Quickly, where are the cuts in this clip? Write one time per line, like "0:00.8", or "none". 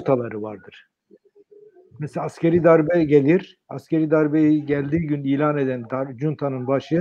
none